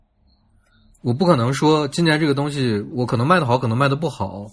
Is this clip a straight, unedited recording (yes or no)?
no